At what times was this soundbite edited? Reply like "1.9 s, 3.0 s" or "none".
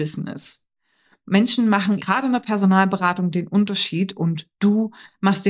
2.0 s